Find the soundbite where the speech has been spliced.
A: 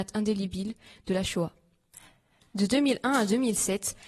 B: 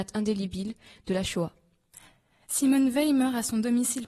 A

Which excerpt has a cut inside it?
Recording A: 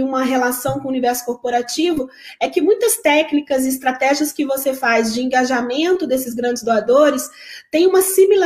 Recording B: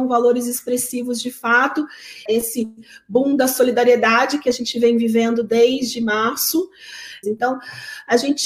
B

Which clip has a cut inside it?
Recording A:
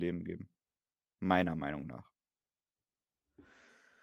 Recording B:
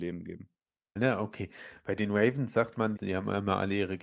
B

